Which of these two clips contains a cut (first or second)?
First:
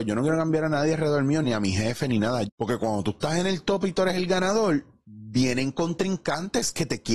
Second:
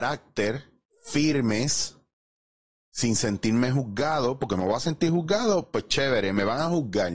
first